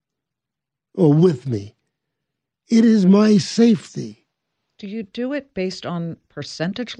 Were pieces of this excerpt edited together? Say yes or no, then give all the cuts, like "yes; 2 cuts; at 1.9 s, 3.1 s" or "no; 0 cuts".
no; 0 cuts